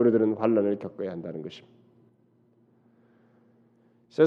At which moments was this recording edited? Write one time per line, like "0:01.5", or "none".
none